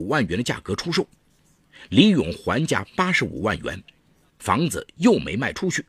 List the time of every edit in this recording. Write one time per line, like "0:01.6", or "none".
0:04.3